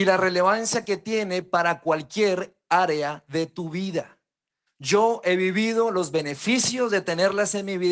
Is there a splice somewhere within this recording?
yes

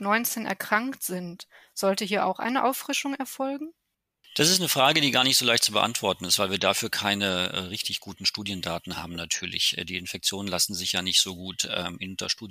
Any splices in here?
no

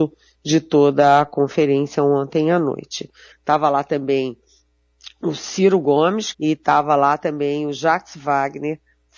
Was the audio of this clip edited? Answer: yes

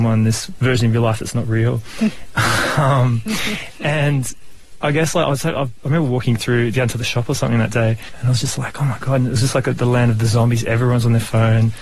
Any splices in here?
no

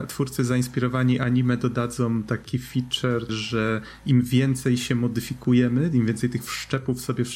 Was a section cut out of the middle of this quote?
yes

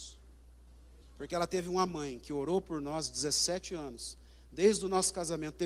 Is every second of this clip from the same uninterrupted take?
no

